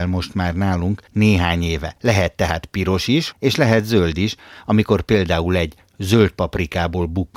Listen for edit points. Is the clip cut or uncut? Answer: cut